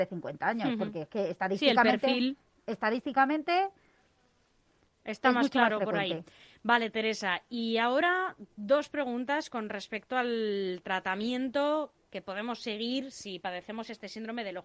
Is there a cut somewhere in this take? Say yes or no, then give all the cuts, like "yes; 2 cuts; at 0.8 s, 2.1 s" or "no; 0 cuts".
no; 0 cuts